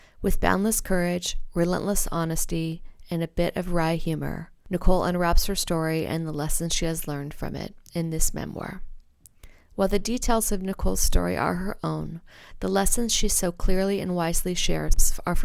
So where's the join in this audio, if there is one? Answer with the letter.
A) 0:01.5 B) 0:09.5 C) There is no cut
C